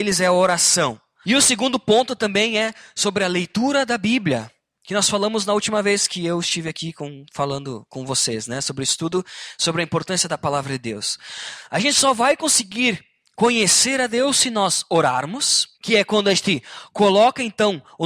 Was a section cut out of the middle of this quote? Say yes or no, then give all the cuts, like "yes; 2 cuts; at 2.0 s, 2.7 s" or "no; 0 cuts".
yes; 2 cuts; at 1.2 s, 15.7 s